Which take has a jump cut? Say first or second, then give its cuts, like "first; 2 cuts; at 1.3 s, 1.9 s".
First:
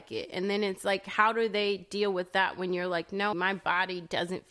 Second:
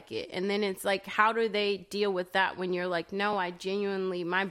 first; 1 cut; at 3.3 s